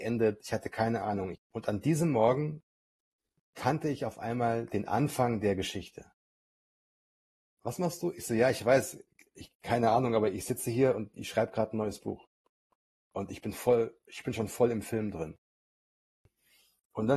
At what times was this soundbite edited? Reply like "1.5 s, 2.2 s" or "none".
1.3 s, 7.5 s